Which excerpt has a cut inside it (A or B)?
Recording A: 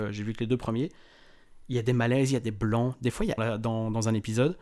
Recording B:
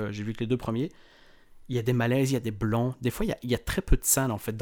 A